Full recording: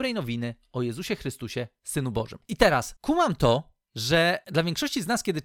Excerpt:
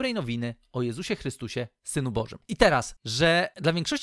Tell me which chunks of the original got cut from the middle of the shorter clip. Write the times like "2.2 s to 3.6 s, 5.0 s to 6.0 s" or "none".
3.0 s to 3.9 s